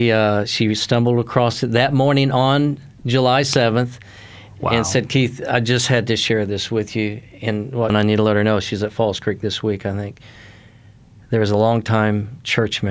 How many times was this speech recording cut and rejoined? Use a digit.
1